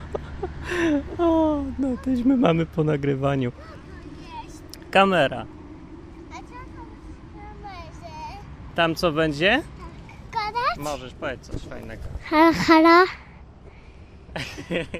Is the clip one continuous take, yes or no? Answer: no